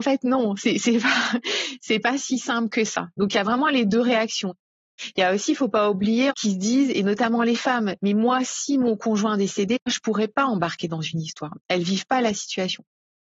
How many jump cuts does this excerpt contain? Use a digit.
2